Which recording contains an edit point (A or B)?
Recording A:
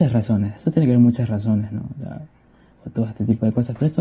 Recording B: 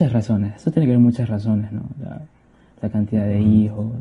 A